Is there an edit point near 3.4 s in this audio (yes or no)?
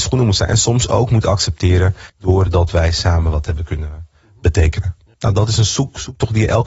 no